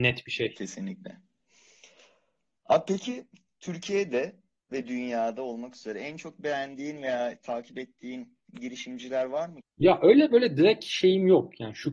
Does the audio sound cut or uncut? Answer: cut